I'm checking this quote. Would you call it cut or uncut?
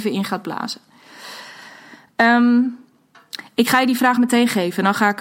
uncut